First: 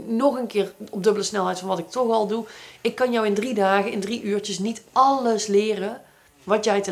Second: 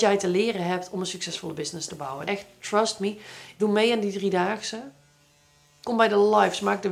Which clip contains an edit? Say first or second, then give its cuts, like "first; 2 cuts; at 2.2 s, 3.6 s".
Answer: second; 3 cuts; at 2.3 s, 3.6 s, 5.8 s